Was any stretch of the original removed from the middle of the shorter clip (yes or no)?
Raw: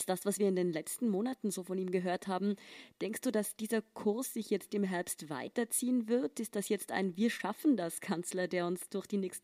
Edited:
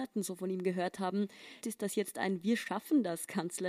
yes